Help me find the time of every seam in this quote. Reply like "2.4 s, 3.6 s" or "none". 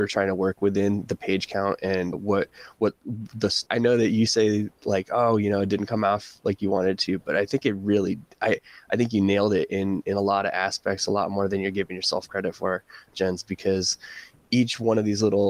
2.1 s, 3.7 s